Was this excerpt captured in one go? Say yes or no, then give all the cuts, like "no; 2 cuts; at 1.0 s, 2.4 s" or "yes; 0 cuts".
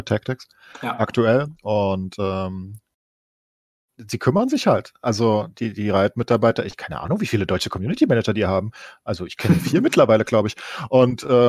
yes; 0 cuts